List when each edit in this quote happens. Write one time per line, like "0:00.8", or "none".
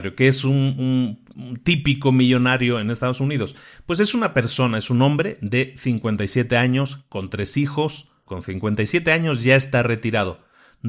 0:07.1
0:08.3